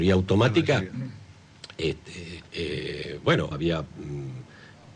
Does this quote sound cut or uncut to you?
cut